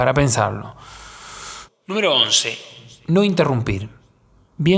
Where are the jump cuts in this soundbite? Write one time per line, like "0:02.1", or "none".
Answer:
0:01.7